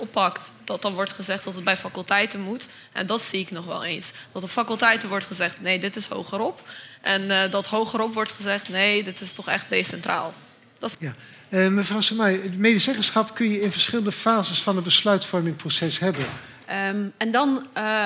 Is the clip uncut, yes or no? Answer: no